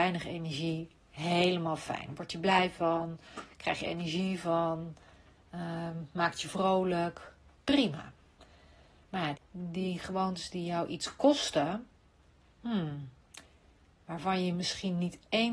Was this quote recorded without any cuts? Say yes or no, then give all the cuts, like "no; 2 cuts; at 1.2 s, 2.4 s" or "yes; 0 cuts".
no; 1 cut; at 9.3 s